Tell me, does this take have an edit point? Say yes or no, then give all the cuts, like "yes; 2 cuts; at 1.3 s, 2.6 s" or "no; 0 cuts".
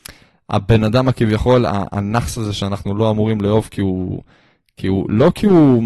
no; 0 cuts